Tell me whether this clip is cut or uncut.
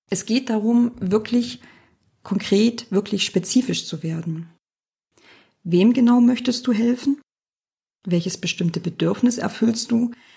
uncut